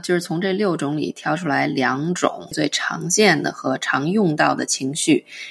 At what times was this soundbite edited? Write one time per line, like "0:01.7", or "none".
0:02.5

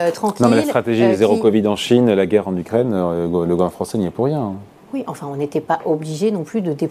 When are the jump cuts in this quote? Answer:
none

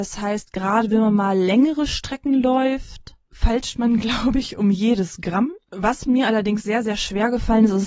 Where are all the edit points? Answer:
none

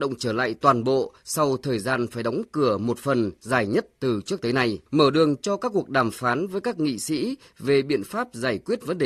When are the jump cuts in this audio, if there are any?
0:04.9

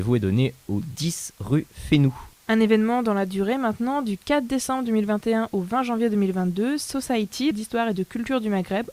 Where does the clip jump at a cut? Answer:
0:02.4
0:07.5

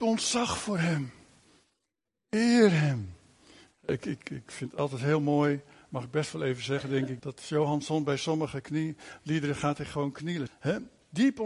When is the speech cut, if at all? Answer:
0:07.2
0:10.5

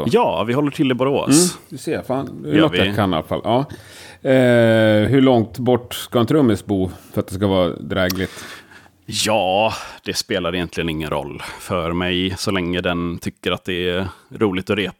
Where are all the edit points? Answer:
0:05.1

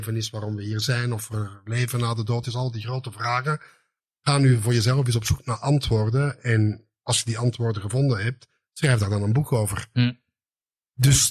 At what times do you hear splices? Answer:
none

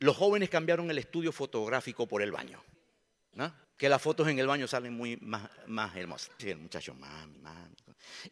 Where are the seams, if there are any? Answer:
0:06.4

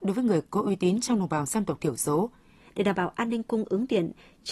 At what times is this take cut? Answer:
0:02.6

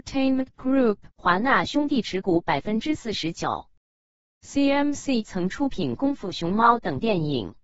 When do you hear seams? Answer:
0:01.1

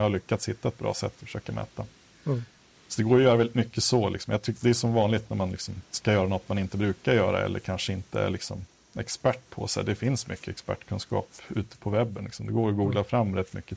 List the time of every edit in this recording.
none

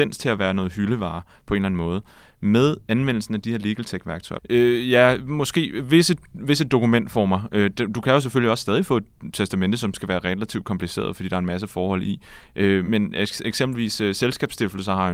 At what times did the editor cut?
0:04.4
0:12.9

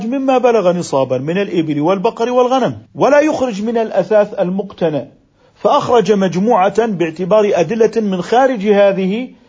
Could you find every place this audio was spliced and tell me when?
0:02.9

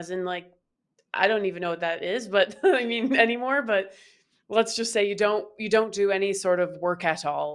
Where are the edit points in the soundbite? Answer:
none

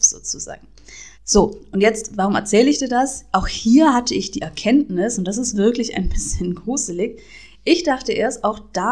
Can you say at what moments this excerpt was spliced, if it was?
0:01.1

